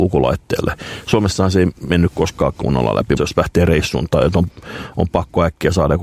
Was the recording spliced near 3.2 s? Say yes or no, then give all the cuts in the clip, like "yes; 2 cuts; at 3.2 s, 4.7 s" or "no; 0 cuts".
yes; 1 cut; at 3.2 s